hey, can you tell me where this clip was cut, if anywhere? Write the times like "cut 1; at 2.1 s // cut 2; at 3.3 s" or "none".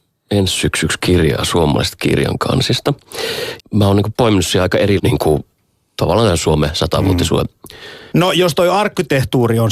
cut 1; at 3.6 s // cut 2; at 5.0 s // cut 3; at 8.1 s